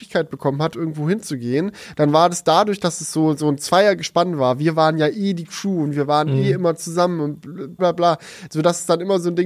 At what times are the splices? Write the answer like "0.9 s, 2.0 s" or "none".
7.8 s